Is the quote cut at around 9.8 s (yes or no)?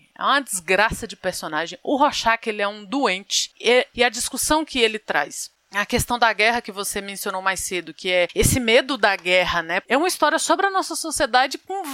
yes